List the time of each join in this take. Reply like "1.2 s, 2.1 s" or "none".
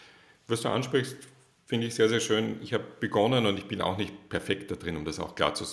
none